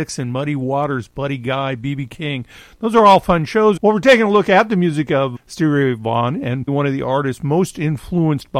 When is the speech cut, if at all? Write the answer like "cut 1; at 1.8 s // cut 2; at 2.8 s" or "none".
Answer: cut 1; at 3.8 s // cut 2; at 5.4 s // cut 3; at 6.7 s